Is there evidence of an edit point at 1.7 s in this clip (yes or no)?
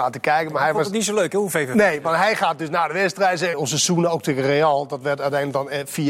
no